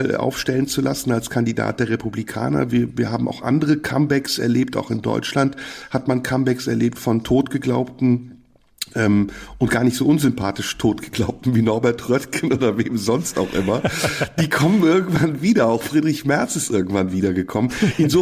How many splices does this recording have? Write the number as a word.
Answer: zero